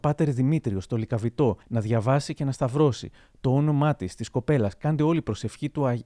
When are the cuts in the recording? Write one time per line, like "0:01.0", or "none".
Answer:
none